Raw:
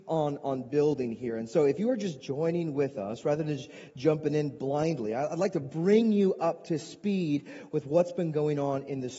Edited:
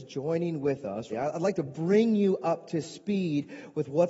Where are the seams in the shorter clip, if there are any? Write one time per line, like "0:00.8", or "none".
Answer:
0:01.1